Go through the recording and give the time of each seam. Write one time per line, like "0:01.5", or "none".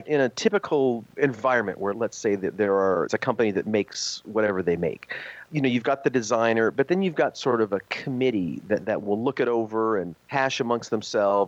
0:10.2